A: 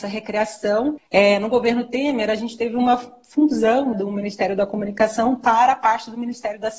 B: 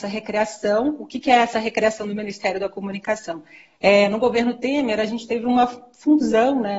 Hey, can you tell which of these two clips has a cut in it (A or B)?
A